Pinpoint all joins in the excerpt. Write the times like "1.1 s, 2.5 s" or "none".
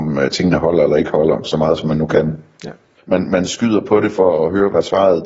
3.0 s